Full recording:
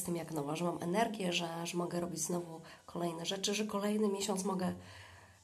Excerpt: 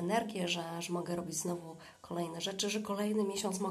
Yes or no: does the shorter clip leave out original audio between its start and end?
no